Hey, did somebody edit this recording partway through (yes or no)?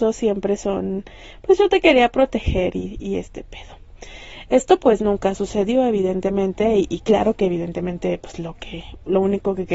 yes